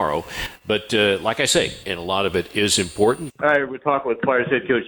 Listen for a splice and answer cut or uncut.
cut